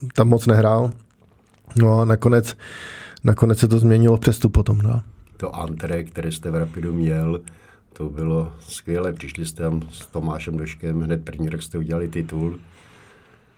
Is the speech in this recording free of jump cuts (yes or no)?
yes